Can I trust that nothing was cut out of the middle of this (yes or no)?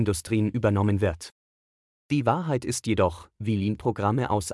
no